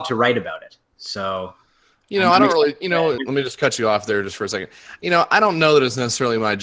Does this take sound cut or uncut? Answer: cut